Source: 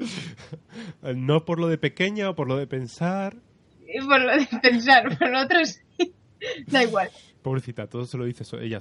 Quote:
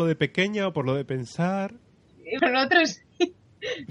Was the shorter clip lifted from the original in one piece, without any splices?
no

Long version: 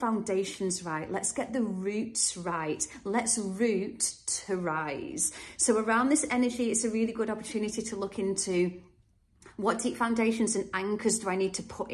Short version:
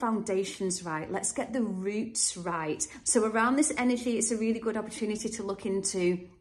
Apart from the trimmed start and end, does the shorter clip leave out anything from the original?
yes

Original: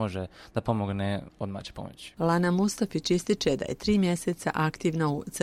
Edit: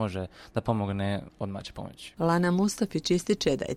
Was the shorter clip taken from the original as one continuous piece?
yes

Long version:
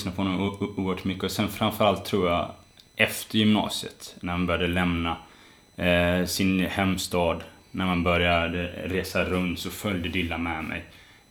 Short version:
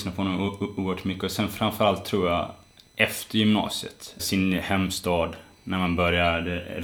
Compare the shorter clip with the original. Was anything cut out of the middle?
yes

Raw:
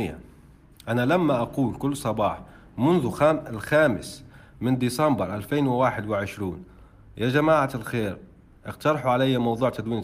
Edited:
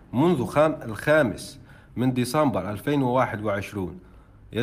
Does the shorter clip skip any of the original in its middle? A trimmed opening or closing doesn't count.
no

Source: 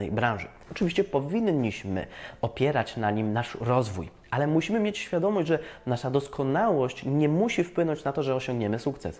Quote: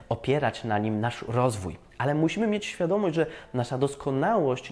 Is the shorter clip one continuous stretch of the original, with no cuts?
yes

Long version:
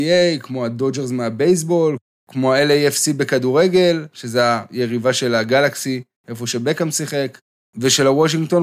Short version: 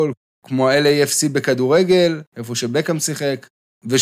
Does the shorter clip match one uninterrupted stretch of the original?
no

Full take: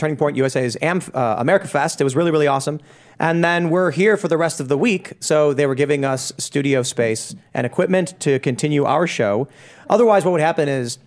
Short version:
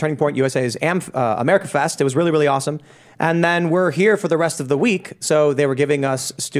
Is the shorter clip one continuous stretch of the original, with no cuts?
yes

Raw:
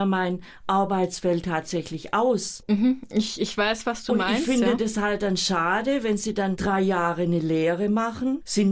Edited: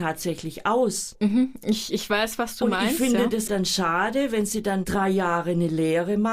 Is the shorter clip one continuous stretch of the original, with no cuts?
no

